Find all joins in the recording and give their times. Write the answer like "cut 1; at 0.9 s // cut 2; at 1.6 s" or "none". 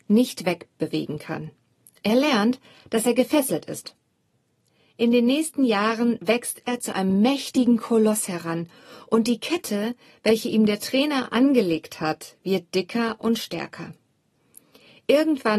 none